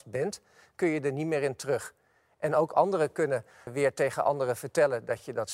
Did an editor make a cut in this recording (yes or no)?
yes